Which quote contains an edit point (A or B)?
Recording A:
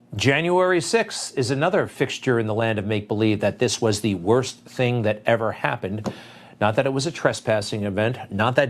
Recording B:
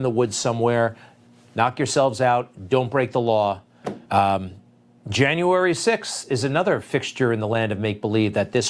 B